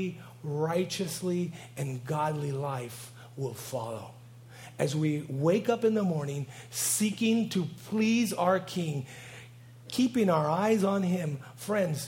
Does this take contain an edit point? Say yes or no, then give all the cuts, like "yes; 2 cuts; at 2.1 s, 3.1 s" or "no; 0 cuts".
no; 0 cuts